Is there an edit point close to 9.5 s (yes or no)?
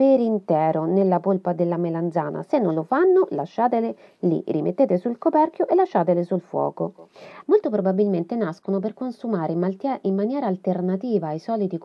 no